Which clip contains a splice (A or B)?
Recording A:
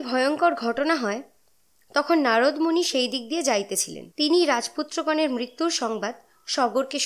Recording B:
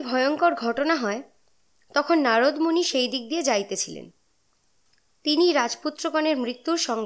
A